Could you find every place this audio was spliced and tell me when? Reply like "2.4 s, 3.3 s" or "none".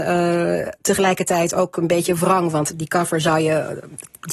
none